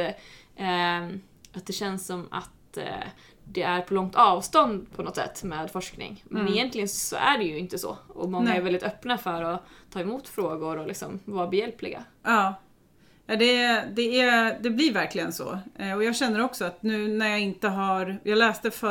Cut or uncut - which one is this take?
uncut